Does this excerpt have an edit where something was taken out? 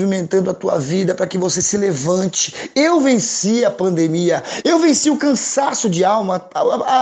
yes; 1 cut; at 4.6 s

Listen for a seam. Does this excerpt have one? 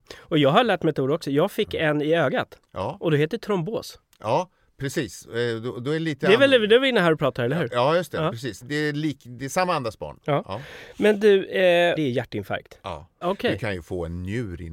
yes; 3 cuts; at 8.6 s, 12.0 s, 13.2 s

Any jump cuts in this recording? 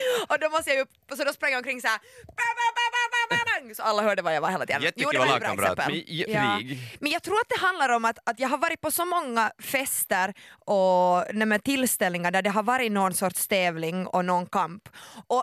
yes; 2 cuts; at 3.4 s, 6.3 s

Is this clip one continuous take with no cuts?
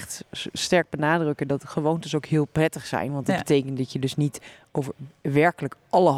yes; 0 cuts

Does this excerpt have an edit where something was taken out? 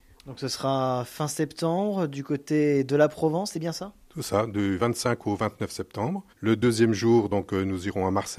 no; 0 cuts

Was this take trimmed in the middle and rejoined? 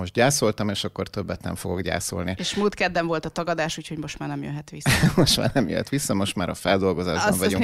no; 0 cuts

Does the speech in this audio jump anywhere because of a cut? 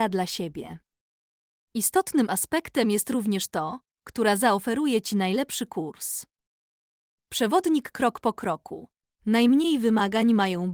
yes; 1 cut; at 9.0 s

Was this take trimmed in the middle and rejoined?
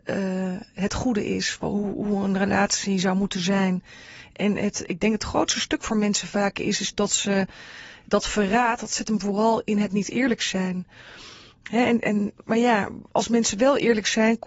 no; 0 cuts

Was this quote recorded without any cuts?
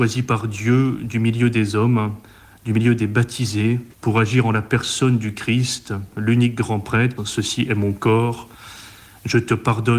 no; 2 cuts; at 3.9 s, 7.2 s

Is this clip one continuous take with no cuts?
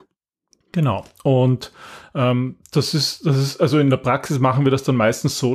yes; 0 cuts

